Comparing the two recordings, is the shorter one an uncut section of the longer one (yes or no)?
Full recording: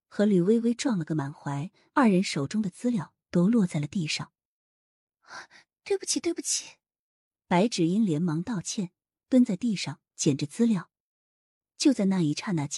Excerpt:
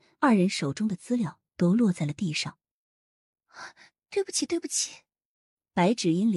yes